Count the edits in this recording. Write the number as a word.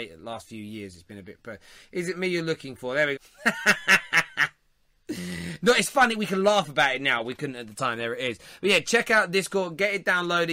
one